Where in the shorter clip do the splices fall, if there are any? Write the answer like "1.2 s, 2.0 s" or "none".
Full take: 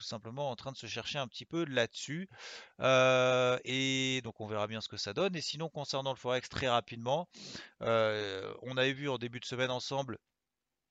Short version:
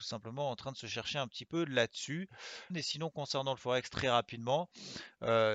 2.7 s